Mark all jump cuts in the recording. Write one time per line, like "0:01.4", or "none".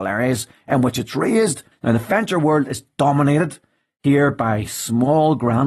0:01.7